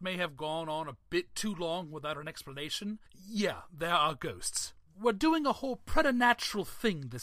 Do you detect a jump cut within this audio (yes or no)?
yes